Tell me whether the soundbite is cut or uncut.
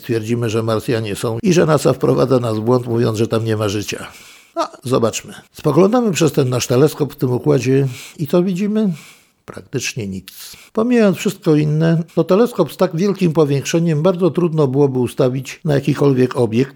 cut